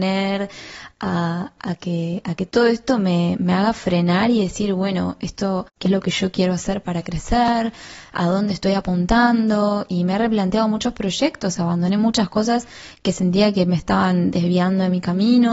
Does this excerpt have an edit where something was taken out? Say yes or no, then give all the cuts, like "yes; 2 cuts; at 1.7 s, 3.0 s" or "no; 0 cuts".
no; 0 cuts